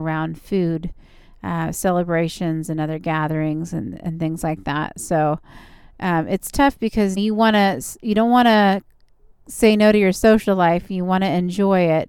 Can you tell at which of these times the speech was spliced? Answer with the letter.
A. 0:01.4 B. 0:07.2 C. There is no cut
B